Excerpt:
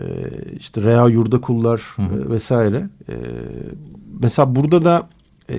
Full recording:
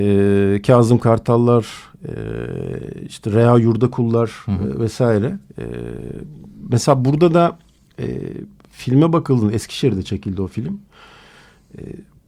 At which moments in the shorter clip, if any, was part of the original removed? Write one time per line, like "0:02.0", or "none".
none